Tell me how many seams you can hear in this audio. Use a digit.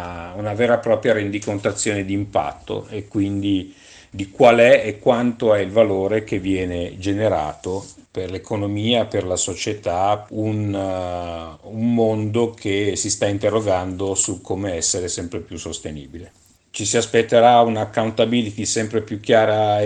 2